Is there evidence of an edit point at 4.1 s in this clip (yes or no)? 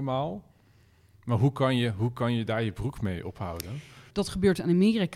yes